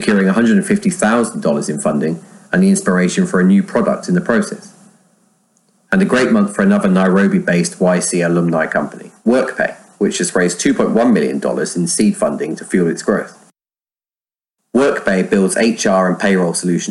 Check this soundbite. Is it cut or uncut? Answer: uncut